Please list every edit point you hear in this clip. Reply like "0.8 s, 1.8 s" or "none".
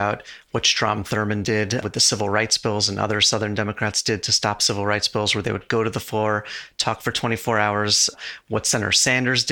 none